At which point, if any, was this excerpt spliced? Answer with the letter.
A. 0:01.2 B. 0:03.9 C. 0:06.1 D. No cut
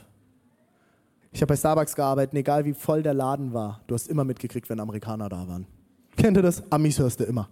A